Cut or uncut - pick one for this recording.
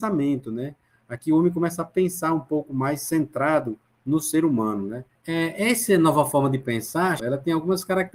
cut